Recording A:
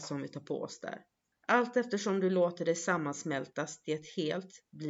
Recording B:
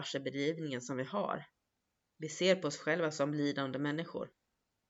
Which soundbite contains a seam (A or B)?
A